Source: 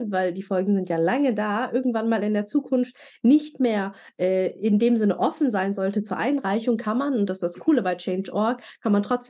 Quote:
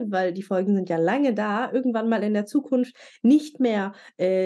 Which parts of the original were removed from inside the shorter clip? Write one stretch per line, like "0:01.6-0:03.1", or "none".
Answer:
none